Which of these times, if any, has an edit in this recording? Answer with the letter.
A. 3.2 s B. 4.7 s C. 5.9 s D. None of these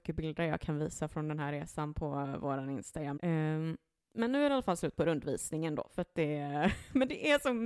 A